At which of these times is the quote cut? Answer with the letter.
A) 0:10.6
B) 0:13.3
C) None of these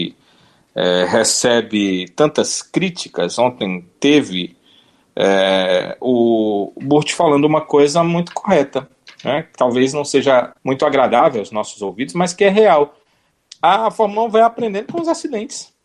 A